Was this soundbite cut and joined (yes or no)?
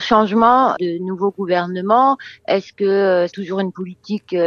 yes